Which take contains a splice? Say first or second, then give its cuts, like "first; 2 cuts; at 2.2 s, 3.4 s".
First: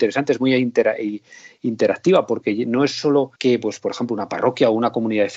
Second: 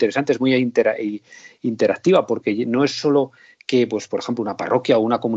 first; 1 cut; at 3.4 s